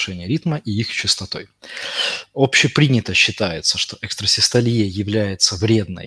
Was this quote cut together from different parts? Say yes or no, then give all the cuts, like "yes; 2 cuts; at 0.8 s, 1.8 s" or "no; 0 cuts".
no; 0 cuts